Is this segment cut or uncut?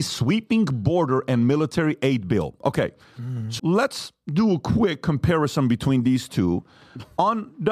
cut